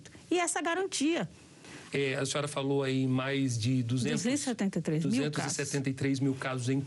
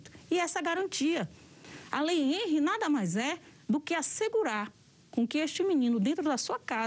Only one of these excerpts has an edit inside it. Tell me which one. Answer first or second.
first